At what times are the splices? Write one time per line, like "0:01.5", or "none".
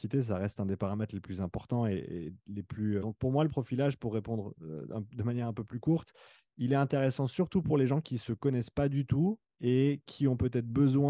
0:03.0